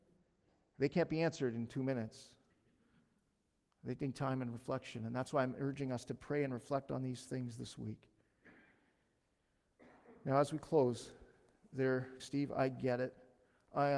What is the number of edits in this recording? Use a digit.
1